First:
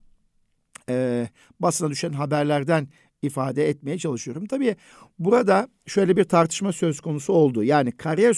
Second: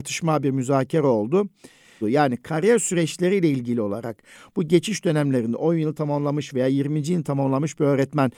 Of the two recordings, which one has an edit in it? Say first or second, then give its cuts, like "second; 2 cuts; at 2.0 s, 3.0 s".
second; 1 cut; at 2.0 s